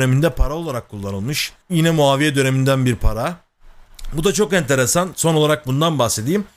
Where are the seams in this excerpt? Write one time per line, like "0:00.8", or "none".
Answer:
0:01.6